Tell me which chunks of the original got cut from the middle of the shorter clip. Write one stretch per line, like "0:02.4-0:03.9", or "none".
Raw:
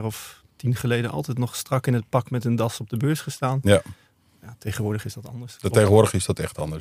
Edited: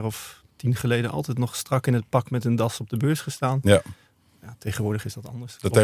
none